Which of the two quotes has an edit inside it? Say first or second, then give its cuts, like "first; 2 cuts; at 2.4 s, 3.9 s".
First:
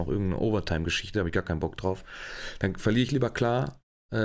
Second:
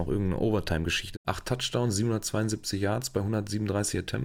second; 1 cut; at 1.1 s